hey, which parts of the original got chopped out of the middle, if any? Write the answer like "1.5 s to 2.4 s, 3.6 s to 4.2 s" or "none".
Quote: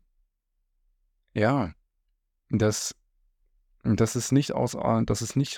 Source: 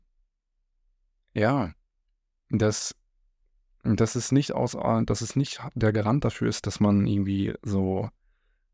none